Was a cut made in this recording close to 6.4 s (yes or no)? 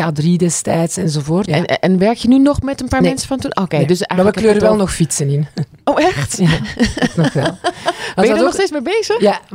no